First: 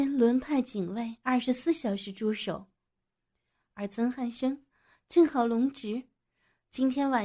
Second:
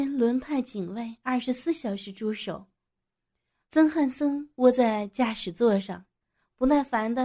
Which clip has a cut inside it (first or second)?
second